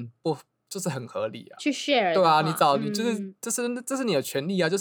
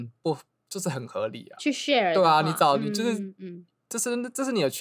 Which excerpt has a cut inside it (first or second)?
first